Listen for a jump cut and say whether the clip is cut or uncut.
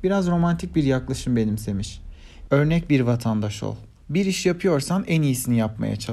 cut